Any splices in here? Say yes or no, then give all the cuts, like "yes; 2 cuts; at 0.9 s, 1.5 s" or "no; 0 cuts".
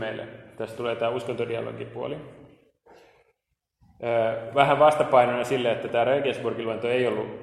no; 0 cuts